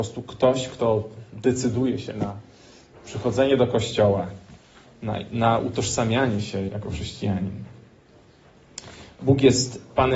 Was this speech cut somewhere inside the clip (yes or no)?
yes